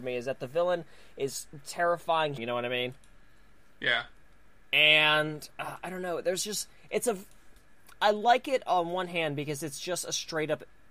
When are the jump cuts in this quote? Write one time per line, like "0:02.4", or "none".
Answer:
0:02.4